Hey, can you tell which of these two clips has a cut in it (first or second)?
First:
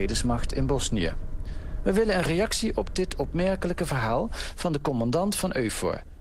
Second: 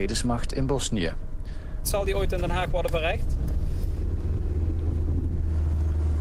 second